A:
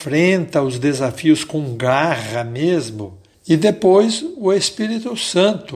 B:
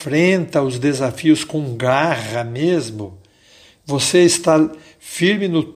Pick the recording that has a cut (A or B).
A